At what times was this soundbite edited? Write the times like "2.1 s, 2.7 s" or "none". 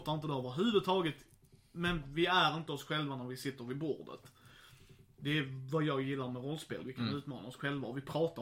none

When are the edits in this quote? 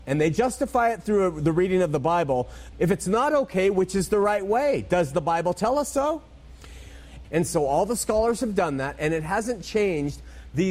2.7 s, 7.2 s

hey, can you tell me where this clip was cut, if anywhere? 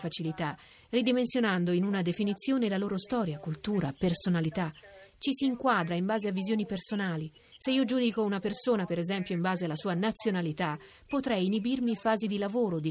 none

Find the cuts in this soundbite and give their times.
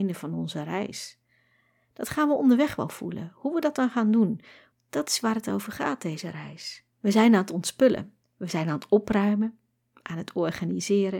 4.7 s, 6.9 s, 8.2 s

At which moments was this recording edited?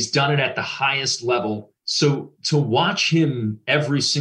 1.8 s

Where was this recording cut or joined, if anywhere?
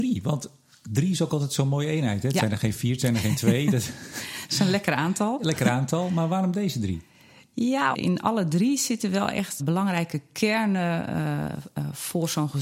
7.9 s, 9.6 s

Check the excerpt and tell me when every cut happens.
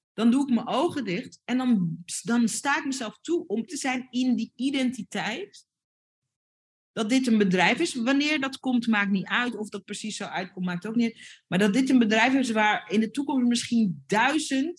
3.7 s

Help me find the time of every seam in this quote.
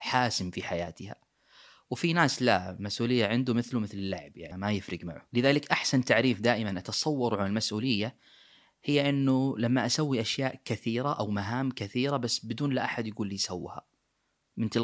4.5 s

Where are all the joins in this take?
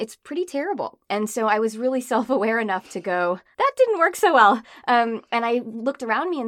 3.5 s

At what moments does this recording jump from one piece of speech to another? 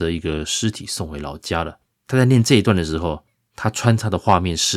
none

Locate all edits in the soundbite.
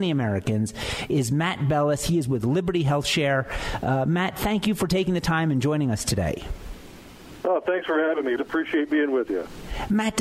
8.4 s

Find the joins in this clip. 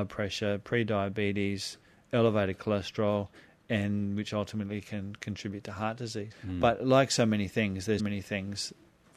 6.3 s, 8.0 s

